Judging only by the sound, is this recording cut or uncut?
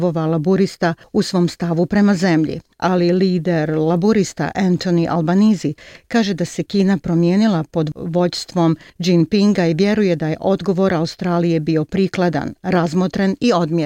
uncut